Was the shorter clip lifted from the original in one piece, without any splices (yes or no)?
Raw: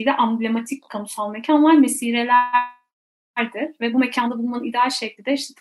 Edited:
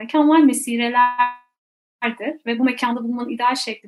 yes